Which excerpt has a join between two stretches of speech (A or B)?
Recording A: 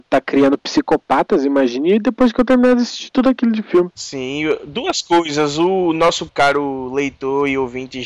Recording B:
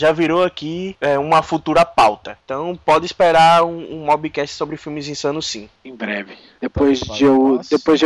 A